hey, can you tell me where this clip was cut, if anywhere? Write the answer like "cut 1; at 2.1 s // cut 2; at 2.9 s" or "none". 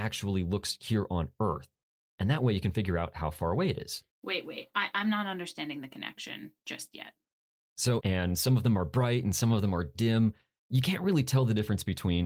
cut 1; at 8.0 s